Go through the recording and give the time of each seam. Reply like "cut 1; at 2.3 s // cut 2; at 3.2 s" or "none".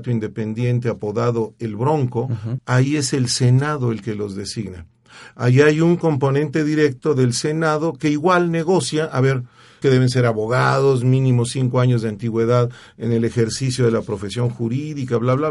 cut 1; at 2.6 s // cut 2; at 9.8 s